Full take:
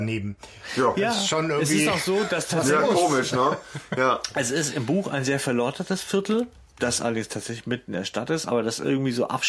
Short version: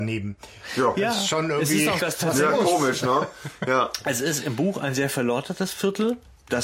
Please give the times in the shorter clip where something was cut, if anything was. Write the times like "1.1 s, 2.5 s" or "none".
2.0 s